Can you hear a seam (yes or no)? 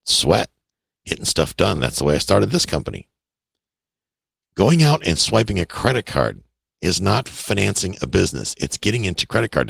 no